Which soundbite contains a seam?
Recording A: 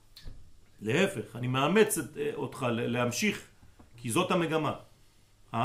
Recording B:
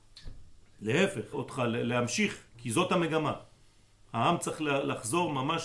B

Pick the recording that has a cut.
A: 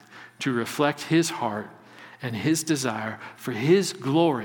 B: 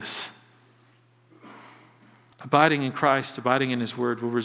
B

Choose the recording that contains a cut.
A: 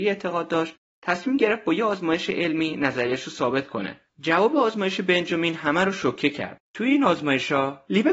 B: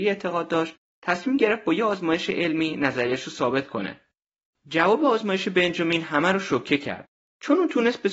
A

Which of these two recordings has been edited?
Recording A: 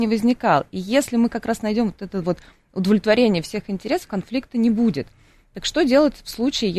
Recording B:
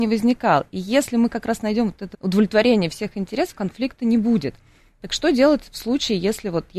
B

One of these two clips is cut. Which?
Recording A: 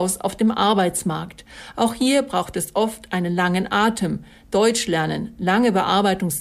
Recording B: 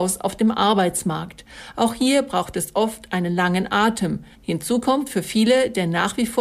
B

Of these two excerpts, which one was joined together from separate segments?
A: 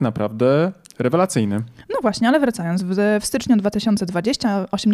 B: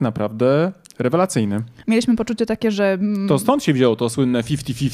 B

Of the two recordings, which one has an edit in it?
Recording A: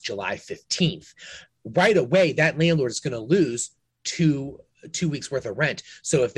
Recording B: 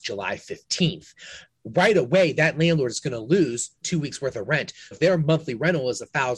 B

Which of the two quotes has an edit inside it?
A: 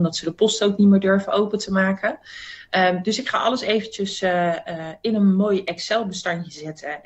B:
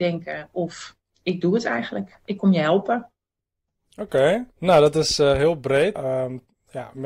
B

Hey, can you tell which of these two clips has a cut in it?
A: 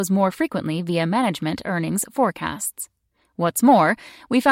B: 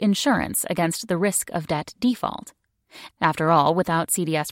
B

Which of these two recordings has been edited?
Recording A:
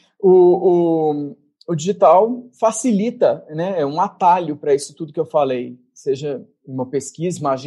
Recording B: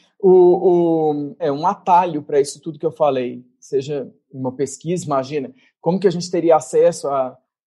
B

